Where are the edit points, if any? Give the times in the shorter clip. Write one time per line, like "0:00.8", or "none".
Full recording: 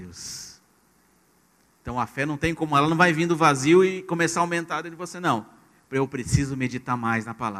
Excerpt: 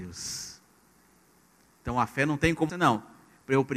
0:02.7